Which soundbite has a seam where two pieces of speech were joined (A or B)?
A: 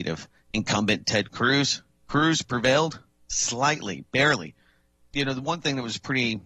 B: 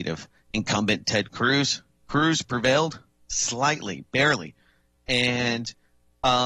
A